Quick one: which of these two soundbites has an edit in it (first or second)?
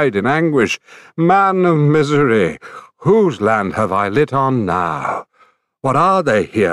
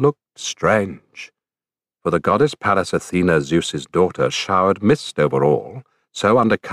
second